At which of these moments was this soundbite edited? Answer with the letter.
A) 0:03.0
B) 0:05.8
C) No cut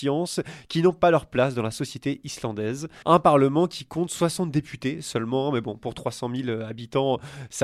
A